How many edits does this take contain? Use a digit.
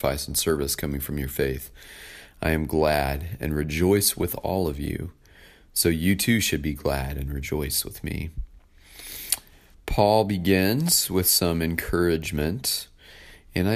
0